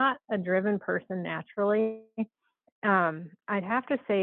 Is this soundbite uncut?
yes; 0 cuts

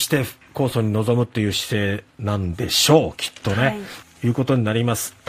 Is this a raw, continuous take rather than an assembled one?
no; 1 cut; at 4.0 s

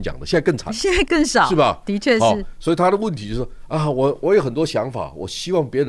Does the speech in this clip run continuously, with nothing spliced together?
no; 1 cut; at 1.0 s

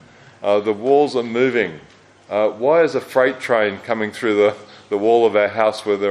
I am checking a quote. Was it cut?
no; 0 cuts

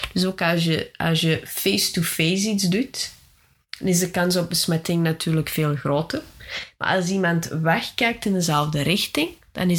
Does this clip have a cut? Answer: no; 0 cuts

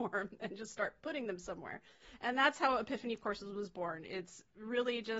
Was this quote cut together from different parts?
no; 0 cuts

